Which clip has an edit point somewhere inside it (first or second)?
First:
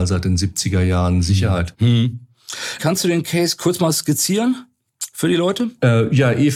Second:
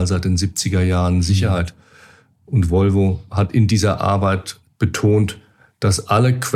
first